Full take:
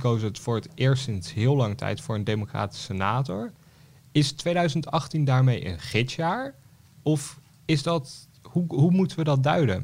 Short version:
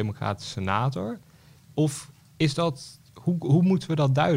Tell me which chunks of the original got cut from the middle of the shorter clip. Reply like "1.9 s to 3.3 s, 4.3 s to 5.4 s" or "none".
3.9 s to 6.8 s

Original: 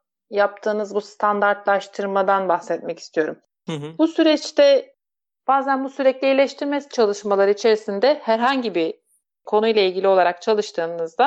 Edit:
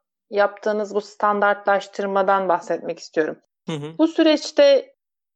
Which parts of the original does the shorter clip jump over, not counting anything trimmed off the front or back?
none

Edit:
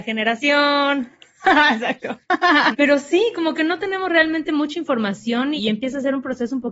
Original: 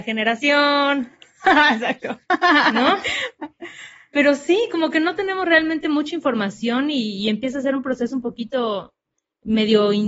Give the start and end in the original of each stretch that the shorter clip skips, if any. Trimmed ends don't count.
2.7 s to 4.1 s, 6.9 s to 7.2 s

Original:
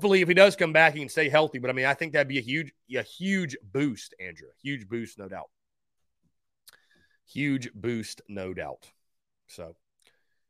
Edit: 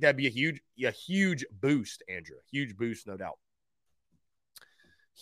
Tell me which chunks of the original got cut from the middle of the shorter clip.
none

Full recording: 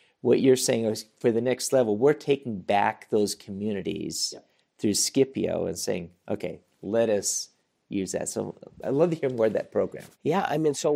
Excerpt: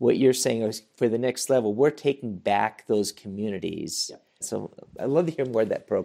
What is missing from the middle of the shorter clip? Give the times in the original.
4.6 s to 8.2 s

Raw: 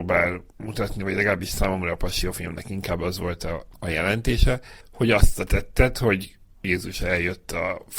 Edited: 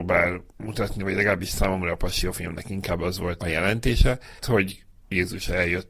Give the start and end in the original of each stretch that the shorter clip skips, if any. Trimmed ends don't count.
3.4 s to 3.8 s, 4.8 s to 5.9 s

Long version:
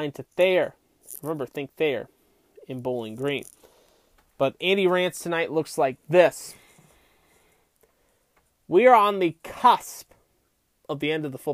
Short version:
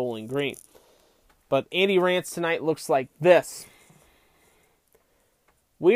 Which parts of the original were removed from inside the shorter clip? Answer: none

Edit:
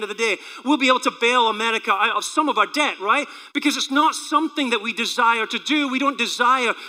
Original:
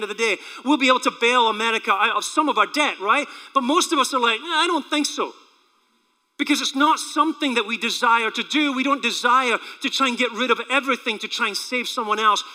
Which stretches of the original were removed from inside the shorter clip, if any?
3.5 s to 6.3 s

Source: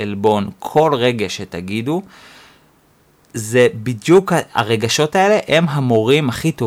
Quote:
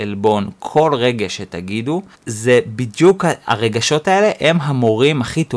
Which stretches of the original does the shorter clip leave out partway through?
2.1 s to 3.2 s

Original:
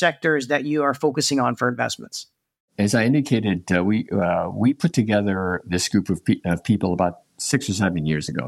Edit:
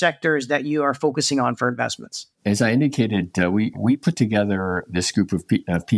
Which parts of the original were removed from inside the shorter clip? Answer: 2.3 s to 2.7 s, 4.1 s to 4.5 s

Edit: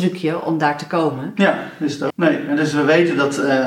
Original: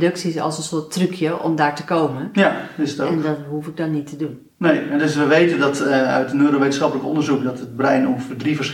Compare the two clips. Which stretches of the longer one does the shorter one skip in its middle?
3.1 s to 4.5 s

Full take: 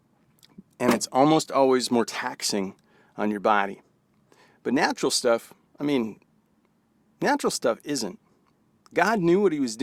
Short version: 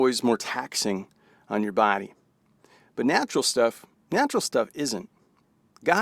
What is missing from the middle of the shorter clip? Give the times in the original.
5.6 s to 7.0 s

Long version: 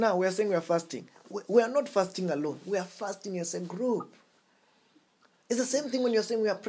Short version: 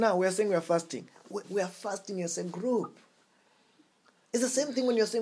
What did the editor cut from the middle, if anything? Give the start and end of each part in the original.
1.4 s to 2.6 s

